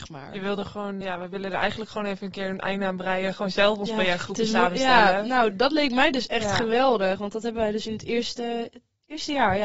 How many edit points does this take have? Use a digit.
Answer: 1